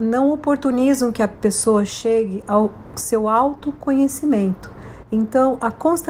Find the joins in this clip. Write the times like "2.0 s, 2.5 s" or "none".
none